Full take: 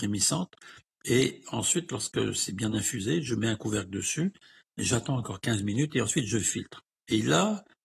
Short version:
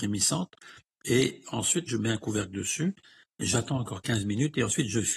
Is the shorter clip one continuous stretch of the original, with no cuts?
no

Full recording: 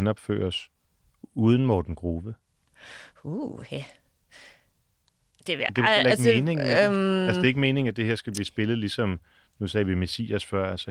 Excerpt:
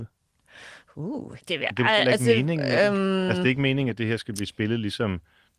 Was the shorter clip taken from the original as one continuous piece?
no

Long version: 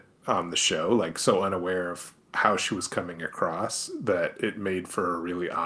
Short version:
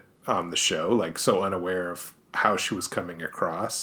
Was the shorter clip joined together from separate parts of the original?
no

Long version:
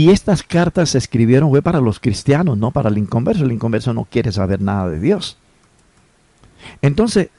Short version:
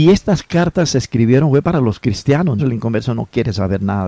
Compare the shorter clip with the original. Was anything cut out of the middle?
yes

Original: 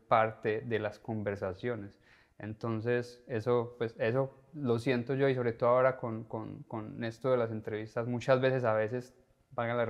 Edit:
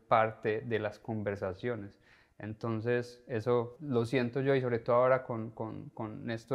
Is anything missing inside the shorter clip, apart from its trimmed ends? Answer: yes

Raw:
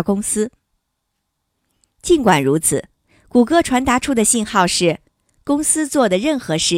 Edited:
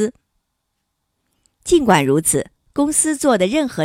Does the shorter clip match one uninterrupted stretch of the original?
no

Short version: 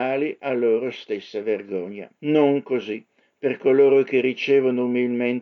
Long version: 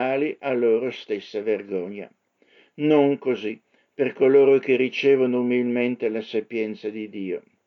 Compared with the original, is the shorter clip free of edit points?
no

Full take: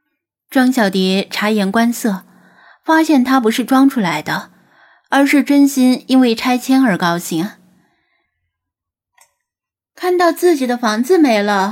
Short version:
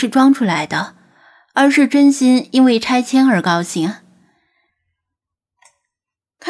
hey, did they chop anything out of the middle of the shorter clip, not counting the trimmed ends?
no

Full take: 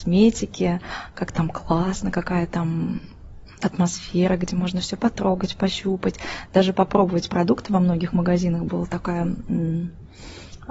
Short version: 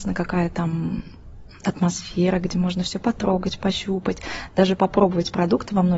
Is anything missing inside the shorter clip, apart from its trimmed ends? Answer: no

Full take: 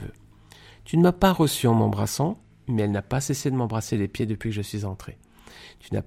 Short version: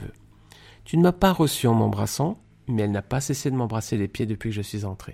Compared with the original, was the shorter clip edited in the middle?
no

